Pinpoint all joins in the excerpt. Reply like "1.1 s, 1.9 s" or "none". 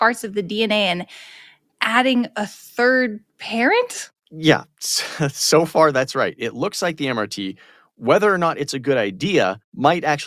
none